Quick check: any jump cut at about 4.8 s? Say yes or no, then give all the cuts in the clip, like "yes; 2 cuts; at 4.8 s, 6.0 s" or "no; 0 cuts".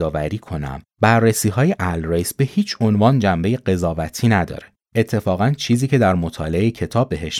yes; 1 cut; at 4.8 s